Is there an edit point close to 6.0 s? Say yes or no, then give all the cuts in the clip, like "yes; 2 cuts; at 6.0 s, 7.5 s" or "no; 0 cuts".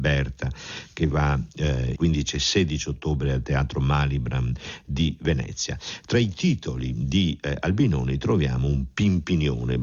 no; 1 cut; at 2.0 s